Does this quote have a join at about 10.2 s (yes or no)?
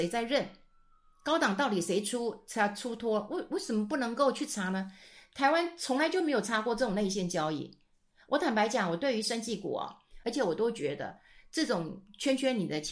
yes